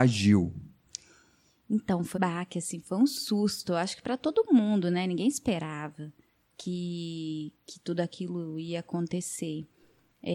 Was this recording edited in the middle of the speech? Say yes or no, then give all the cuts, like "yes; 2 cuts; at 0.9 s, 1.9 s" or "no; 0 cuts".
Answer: yes; 1 cut; at 2.1 s